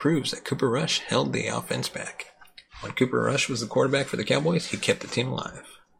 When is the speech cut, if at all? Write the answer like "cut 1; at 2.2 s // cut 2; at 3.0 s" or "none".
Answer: cut 1; at 2.7 s